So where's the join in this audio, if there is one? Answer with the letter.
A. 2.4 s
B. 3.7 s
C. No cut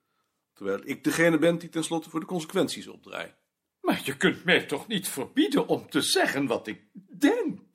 C